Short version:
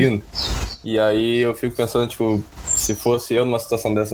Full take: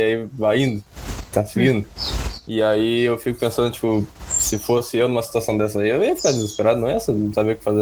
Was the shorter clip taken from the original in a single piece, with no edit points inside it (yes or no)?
yes